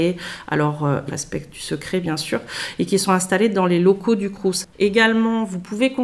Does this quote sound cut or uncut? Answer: cut